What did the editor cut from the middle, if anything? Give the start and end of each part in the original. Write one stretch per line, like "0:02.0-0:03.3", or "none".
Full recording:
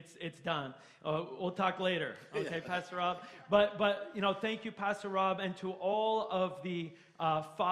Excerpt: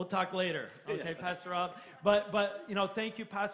none